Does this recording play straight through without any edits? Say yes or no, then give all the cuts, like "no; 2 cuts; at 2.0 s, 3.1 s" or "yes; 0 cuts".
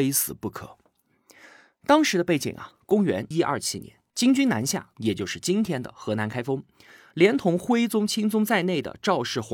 no; 2 cuts; at 3.3 s, 4.9 s